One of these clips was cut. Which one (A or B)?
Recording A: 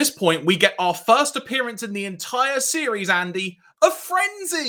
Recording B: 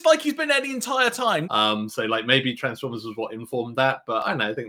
B